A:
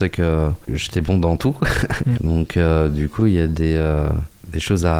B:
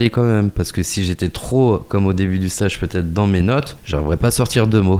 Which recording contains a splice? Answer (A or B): A